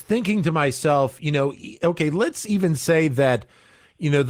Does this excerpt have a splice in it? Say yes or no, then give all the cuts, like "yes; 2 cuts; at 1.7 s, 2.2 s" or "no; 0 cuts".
no; 0 cuts